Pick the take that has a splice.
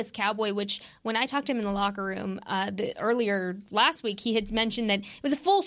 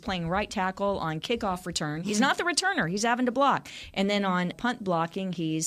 second; 1 cut; at 4.5 s

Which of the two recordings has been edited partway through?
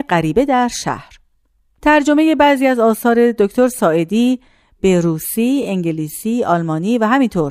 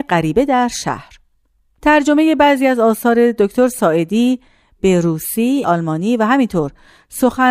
second; 1 cut; at 5.6 s

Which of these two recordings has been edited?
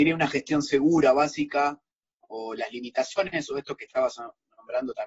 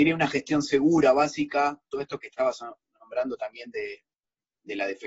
second; 1 cut; at 1.9 s

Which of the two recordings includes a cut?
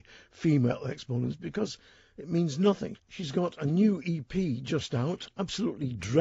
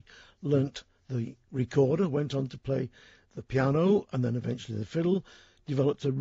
first; 1 cut; at 3.0 s

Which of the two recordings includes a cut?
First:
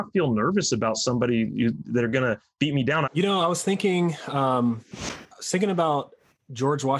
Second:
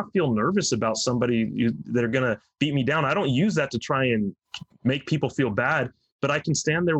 first; 1 cut; at 3.1 s

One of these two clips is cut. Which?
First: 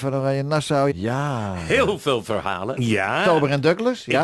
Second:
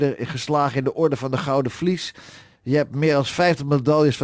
first; 2 cuts; at 0.9 s, 2.8 s

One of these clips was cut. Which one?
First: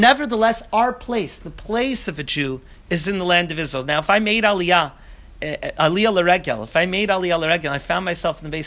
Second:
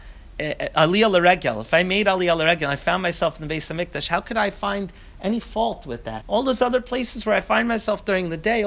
second; 1 cut; at 6.2 s

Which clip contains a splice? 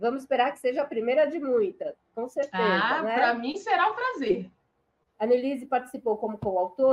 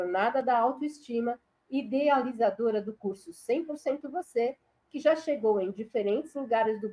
first; 1 cut; at 5.1 s

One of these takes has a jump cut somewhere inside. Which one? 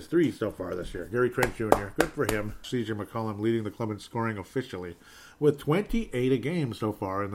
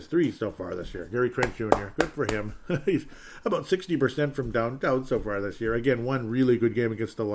first; 1 cut; at 2.6 s

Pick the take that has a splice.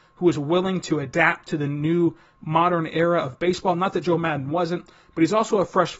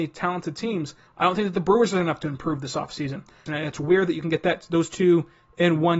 second; 2 cuts; at 1.1 s, 3.5 s

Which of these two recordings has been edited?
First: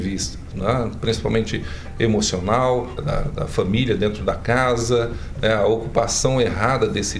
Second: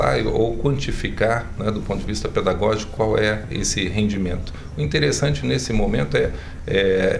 first; 1 cut; at 3.0 s

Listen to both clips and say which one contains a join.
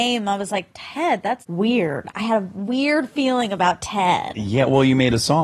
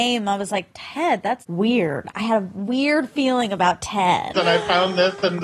second; 1 cut; at 4.3 s

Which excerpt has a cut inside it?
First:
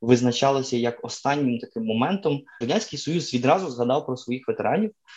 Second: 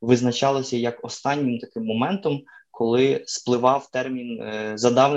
first; 1 cut; at 2.6 s

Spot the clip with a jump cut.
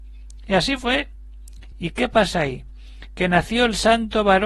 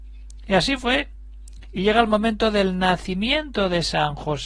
first; 1 cut; at 1.7 s

